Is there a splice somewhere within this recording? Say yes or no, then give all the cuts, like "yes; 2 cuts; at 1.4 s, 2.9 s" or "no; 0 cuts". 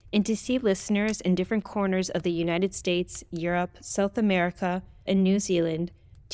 yes; 1 cut; at 5.1 s